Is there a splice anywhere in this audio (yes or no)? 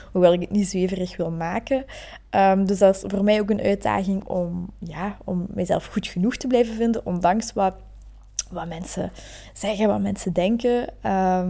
yes